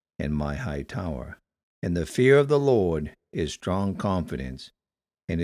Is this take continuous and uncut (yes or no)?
no